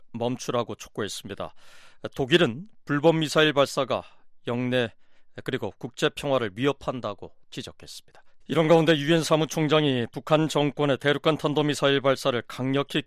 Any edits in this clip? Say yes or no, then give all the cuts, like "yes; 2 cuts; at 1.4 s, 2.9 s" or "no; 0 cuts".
yes; 1 cut; at 8.4 s